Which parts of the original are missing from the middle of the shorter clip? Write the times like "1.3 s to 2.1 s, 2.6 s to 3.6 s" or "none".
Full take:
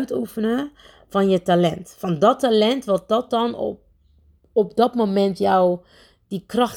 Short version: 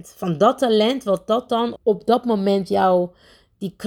3.6 s to 4.5 s